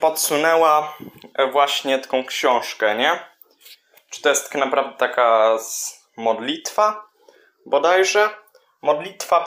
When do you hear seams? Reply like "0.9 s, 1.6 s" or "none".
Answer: none